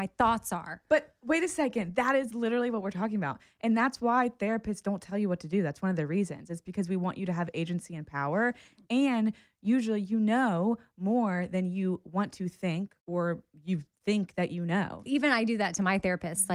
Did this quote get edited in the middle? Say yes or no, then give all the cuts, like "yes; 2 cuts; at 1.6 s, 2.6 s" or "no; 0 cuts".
yes; 2 cuts; at 13.0 s, 15.1 s